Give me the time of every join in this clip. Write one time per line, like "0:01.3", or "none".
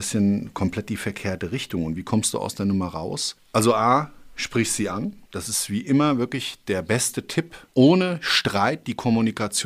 none